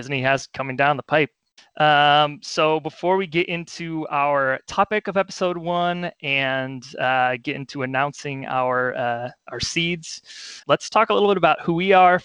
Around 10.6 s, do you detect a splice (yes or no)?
yes